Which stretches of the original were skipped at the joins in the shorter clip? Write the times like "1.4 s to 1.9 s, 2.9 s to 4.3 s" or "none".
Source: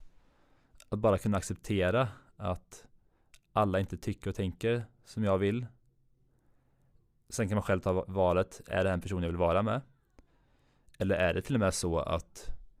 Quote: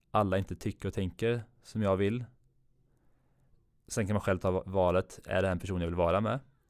none